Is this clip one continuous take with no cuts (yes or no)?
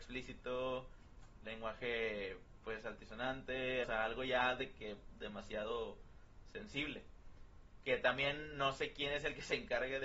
no